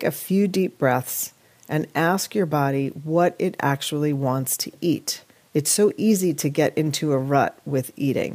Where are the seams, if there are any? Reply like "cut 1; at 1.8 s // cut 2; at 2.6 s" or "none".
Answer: none